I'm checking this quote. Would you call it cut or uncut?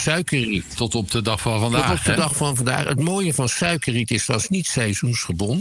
uncut